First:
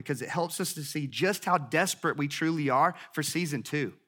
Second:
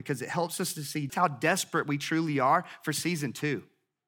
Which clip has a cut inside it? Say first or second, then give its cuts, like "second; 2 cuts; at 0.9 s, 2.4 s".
second; 1 cut; at 1.1 s